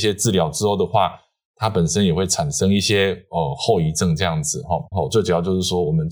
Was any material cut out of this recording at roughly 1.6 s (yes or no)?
no